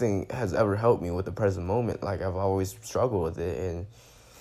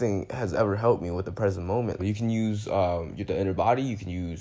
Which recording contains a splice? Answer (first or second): second